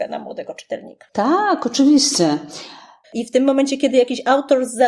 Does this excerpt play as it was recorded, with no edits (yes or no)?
no